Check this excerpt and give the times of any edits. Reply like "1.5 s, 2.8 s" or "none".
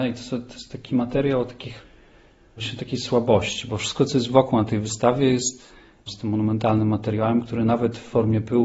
6.1 s